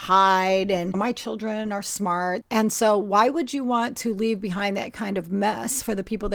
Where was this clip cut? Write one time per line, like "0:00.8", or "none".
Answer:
0:02.4